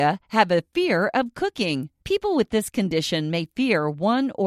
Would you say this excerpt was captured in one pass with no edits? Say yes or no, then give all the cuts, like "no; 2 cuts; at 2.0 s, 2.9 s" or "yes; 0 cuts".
no; 1 cut; at 2.0 s